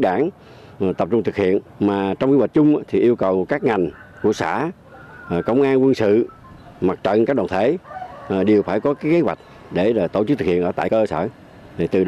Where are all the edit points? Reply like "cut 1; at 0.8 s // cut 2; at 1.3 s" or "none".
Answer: cut 1; at 1.7 s